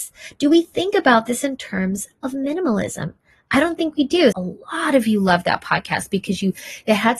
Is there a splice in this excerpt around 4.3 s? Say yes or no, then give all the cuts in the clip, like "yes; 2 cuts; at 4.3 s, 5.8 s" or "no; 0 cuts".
yes; 1 cut; at 4.3 s